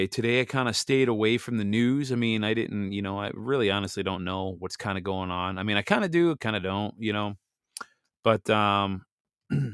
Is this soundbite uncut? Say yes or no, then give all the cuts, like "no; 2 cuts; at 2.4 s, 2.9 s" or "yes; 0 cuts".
yes; 0 cuts